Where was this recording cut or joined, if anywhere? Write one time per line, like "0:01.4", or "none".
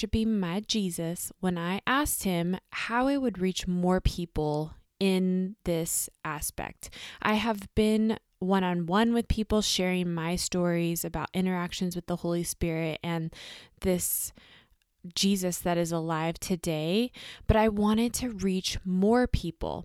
none